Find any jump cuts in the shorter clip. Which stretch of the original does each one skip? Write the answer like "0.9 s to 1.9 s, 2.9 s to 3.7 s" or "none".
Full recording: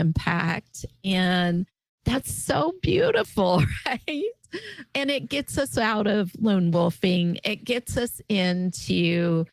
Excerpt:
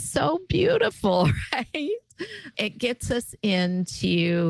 4.9 s to 7.4 s